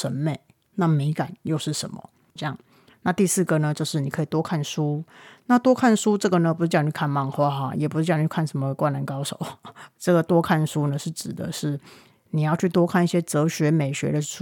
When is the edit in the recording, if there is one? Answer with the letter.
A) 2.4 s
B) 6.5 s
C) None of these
A